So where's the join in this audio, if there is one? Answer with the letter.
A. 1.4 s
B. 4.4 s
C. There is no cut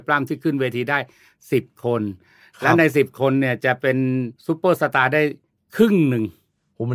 B